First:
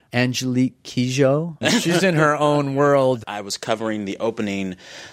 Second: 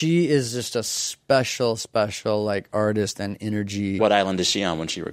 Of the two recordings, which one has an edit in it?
first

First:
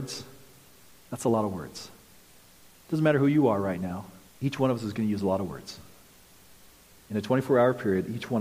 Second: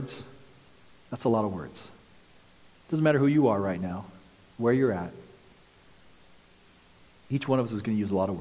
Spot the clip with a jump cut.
first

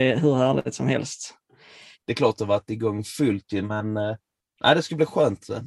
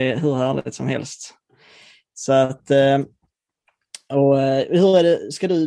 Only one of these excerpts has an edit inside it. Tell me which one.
first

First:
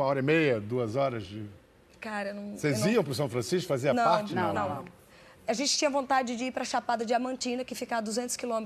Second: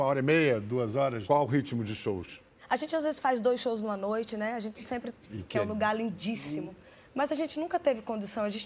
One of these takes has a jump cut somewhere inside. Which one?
second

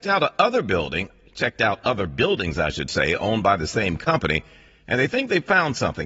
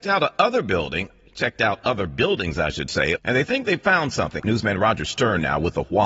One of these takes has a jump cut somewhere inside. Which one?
second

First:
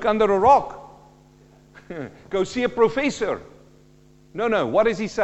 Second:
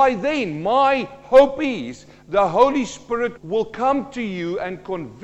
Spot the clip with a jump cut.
second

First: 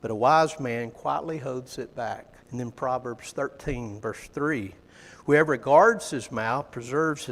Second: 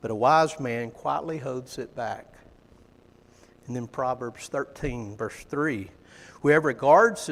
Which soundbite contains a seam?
first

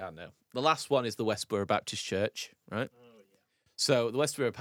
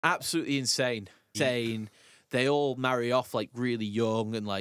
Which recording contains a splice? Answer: second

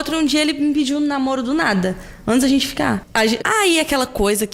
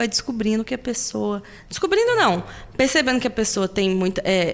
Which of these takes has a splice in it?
first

